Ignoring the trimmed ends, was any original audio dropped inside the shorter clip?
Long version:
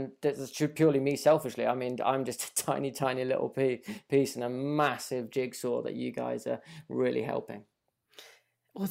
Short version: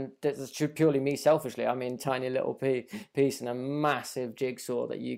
yes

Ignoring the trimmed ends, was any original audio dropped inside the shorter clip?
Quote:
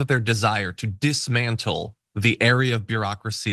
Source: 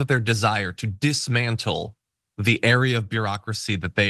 yes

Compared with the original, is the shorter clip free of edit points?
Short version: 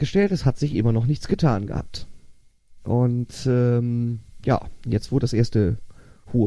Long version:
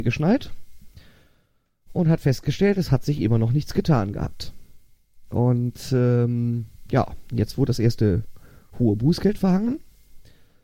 yes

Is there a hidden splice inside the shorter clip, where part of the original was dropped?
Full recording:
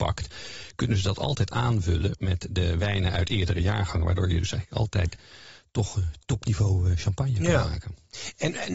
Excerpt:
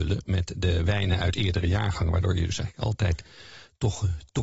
no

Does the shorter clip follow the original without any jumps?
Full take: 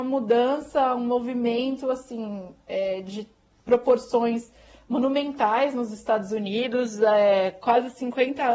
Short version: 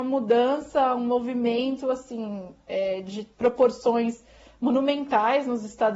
no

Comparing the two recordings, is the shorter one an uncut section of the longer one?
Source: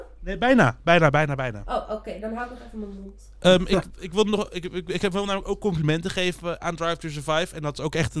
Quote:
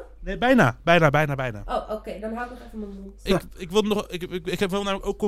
no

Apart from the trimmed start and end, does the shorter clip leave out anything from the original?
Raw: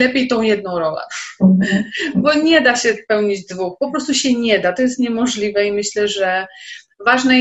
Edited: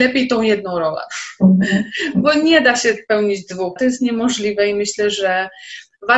yes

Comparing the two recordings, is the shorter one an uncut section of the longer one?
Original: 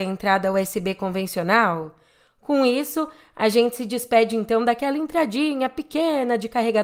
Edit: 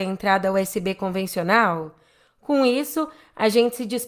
yes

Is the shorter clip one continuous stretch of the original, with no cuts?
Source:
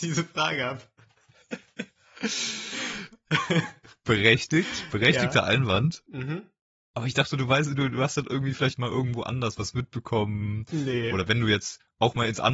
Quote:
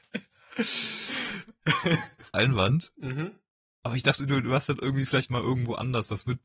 no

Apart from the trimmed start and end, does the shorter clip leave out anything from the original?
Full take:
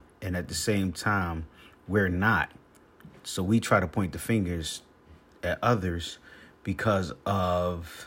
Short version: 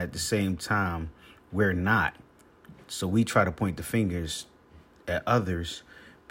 no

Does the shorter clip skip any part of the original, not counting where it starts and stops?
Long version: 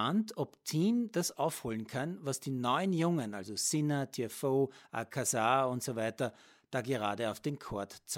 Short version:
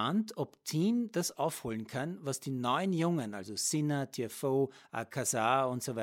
no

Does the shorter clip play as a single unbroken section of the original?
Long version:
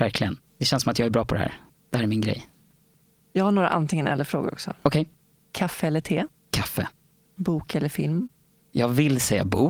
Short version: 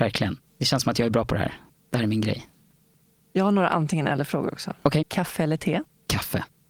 no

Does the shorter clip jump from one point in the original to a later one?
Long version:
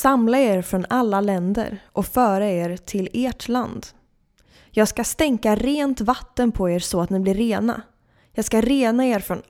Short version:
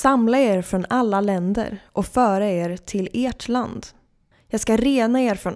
yes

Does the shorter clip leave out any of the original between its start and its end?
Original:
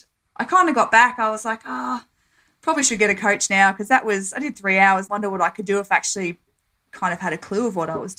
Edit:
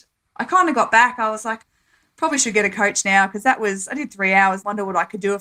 yes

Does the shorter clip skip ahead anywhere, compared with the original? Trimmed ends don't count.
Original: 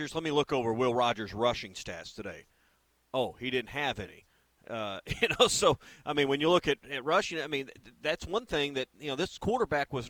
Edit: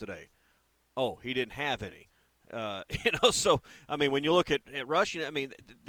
no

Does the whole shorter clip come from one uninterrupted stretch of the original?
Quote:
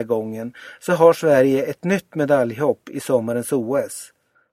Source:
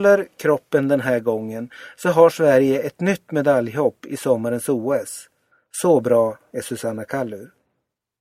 yes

